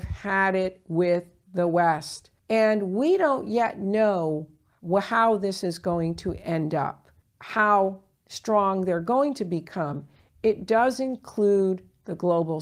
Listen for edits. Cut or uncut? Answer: cut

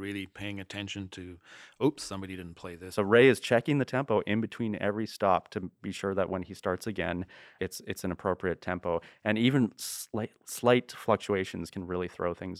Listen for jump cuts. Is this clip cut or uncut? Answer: cut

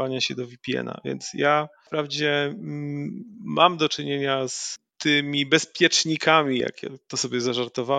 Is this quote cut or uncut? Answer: uncut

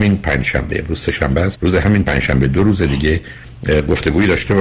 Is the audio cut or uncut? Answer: cut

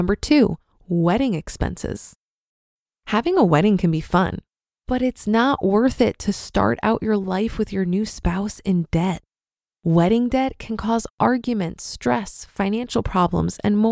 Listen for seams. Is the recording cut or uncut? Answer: uncut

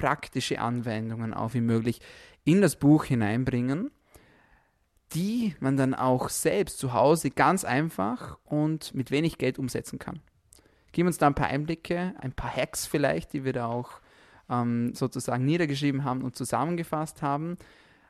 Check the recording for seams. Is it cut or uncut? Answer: cut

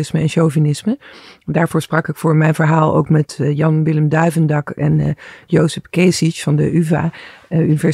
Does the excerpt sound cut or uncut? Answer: uncut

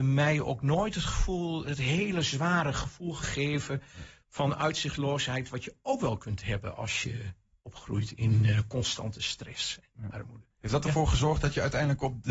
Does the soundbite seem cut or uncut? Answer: uncut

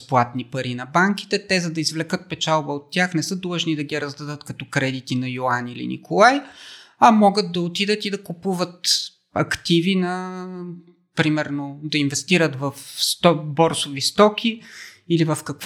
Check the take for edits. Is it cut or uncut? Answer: uncut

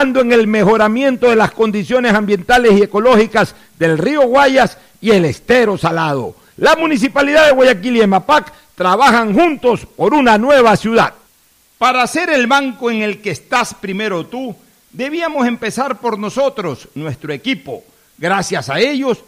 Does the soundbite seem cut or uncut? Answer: uncut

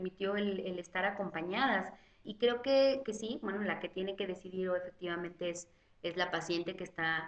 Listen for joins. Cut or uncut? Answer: uncut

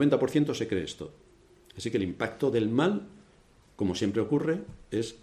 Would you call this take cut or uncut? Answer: uncut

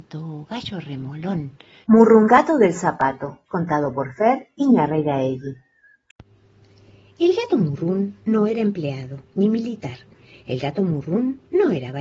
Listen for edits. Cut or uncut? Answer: cut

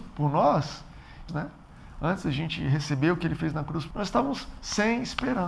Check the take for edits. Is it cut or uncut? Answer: cut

